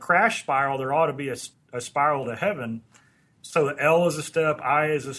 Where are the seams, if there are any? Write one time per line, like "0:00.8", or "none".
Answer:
0:01.5
0:03.4